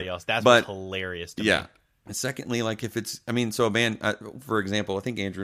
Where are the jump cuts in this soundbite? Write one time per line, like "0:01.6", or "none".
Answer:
0:02.1